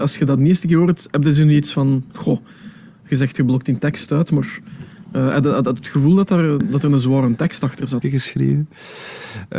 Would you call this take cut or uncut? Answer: cut